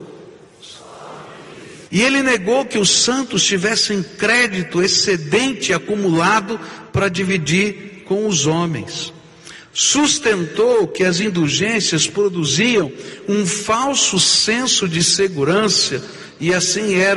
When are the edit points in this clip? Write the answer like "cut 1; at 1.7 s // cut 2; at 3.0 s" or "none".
cut 1; at 1.9 s